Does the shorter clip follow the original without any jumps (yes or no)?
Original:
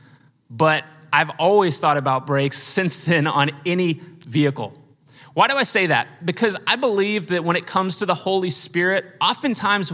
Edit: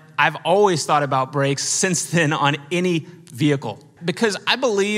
no